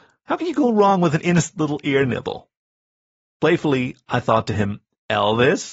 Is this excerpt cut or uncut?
uncut